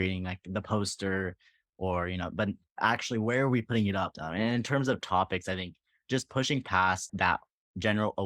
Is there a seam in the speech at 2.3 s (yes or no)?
no